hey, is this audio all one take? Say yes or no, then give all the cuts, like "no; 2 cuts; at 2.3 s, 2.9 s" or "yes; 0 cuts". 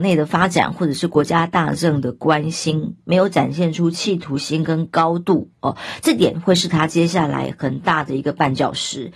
yes; 0 cuts